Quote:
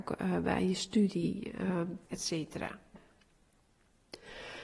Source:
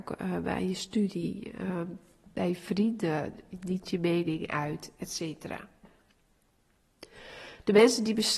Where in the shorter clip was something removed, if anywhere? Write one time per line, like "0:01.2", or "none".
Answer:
0:02.1